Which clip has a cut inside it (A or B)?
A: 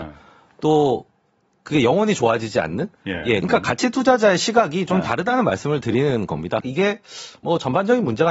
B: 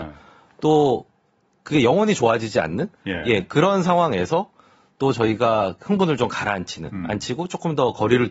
A